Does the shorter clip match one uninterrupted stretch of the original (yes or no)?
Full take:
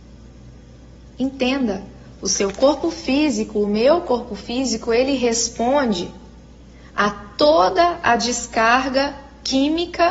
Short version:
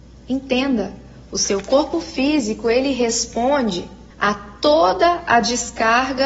no